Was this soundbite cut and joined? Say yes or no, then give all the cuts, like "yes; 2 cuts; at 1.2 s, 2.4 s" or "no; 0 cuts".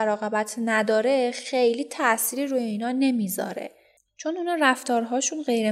no; 0 cuts